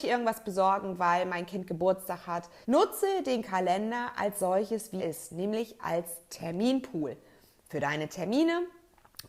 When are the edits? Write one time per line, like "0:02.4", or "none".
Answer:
0:02.6
0:05.0